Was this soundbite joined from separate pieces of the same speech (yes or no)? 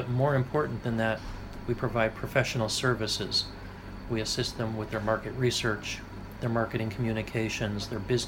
no